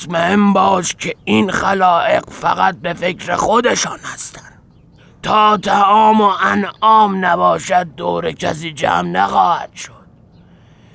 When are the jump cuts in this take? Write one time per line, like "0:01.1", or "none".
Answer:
none

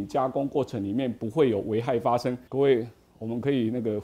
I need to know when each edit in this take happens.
0:02.5

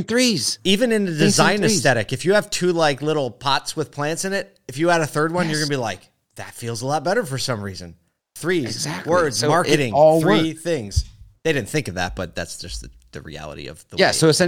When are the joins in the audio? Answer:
none

